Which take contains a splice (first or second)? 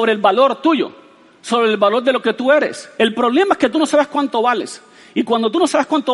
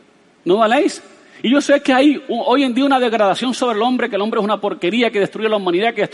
first